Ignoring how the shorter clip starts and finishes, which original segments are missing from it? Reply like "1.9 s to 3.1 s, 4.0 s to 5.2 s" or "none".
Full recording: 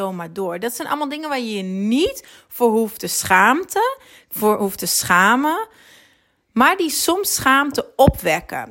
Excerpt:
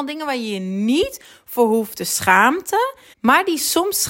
4.2 s to 6.4 s